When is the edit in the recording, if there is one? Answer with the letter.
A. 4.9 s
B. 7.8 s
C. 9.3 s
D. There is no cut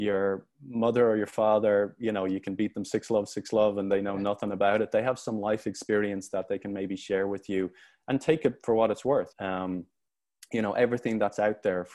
C